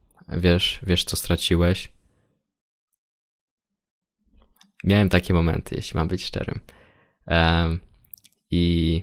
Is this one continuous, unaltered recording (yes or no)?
yes